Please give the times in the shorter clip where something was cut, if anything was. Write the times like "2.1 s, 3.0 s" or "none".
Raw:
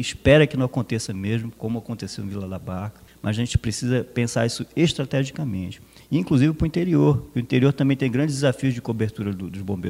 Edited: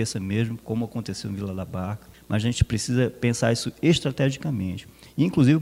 none